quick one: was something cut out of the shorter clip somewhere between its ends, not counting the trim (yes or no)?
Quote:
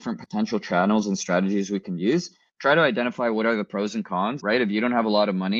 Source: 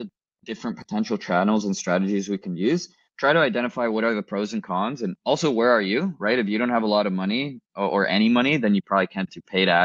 yes